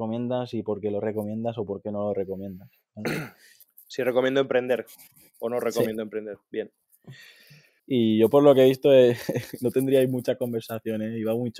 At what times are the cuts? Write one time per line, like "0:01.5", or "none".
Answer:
0:07.8